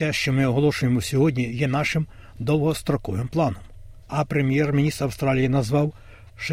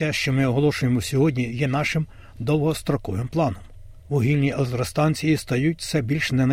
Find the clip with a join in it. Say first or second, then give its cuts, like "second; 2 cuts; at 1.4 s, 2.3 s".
first; 1 cut; at 4.0 s